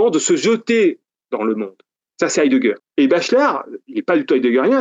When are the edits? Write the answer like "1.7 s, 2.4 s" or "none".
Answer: 2.8 s